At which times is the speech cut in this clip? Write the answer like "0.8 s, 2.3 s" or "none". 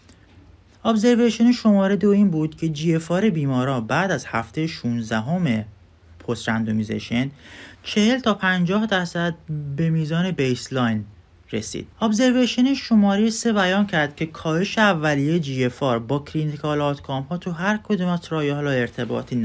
7.8 s, 11.9 s